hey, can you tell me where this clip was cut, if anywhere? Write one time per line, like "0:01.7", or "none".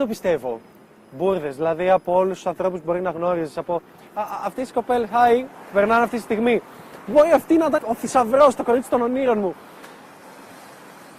0:07.8